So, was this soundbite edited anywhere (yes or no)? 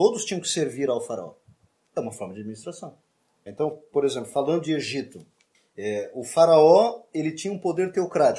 yes